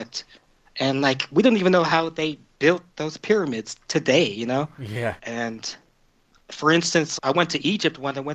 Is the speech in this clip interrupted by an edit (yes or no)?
yes